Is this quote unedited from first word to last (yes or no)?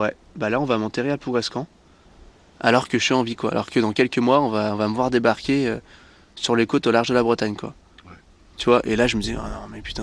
yes